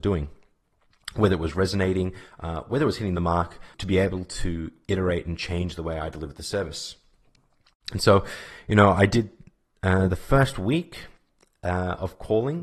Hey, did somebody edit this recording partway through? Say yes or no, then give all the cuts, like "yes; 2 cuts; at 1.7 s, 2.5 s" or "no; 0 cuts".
yes; 1 cut; at 3.7 s